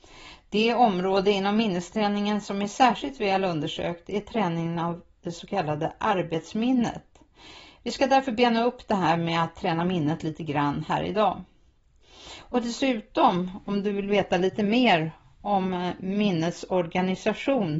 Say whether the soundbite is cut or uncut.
uncut